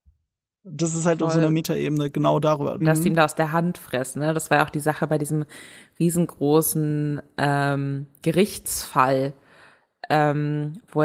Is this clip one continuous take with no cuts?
no; 1 cut; at 2.8 s

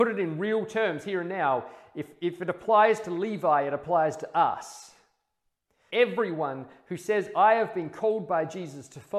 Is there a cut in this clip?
yes; 1 cut; at 5.9 s

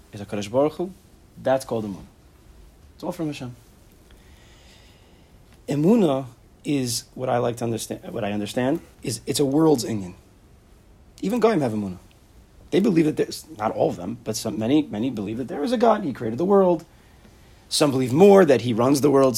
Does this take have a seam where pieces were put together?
yes; 1 cut; at 8.9 s

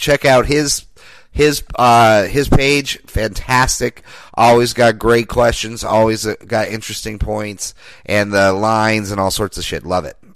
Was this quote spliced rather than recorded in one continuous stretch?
no; 0 cuts

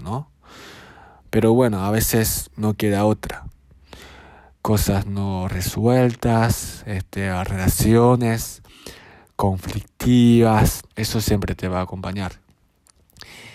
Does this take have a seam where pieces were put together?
yes; 2 cuts; at 4.5 s, 10.9 s

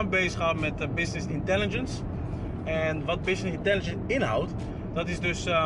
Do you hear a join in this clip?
no; 0 cuts

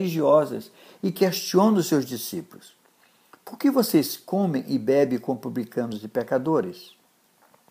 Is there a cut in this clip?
no; 0 cuts

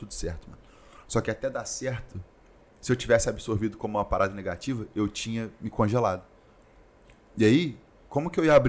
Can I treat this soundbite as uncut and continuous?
yes; 0 cuts

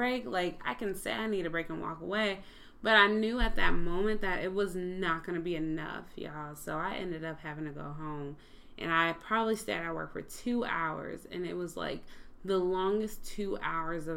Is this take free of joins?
yes; 0 cuts

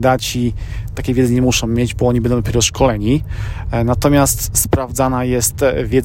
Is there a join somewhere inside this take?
no; 0 cuts

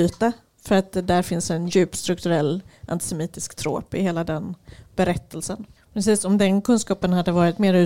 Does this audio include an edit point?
yes; 2 cuts; at 1.7 s, 5.8 s

